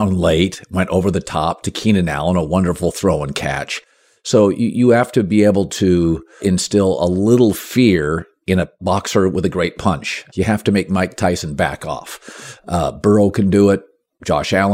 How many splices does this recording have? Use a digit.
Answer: 2